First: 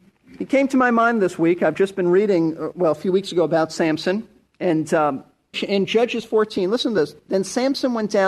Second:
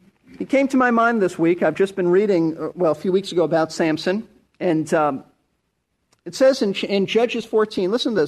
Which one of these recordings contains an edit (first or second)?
first